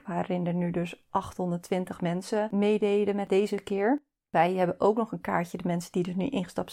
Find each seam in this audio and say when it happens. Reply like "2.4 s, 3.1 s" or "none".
none